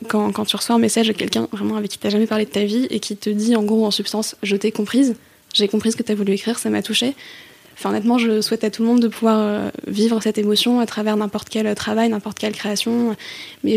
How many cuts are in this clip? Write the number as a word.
zero